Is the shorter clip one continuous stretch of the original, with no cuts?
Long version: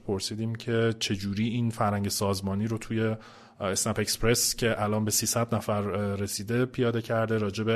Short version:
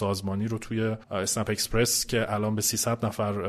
no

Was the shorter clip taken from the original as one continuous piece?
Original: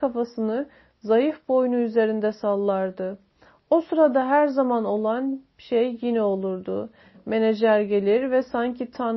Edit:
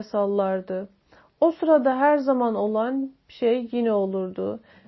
yes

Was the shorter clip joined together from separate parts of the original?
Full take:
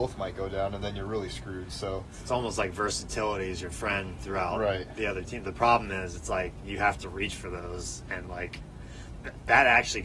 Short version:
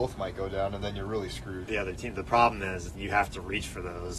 yes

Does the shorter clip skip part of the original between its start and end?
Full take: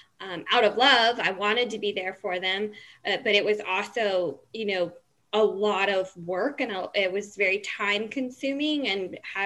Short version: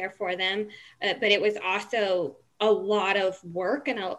yes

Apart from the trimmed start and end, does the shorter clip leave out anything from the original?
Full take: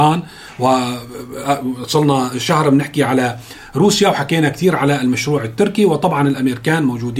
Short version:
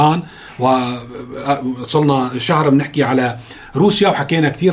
no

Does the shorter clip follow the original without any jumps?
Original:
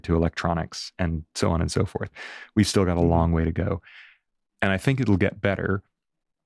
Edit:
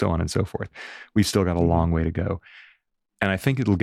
yes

